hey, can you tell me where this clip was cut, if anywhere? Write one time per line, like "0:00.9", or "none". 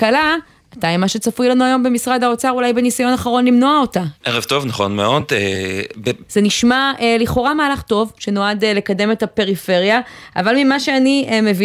0:04.1
0:06.3